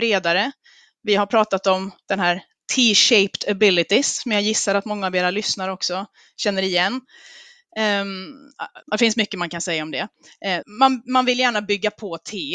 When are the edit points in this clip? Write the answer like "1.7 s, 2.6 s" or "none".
8.8 s, 10.6 s